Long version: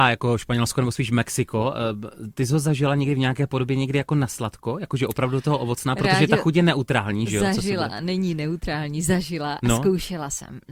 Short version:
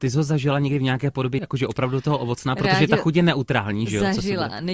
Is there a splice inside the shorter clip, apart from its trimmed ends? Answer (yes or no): yes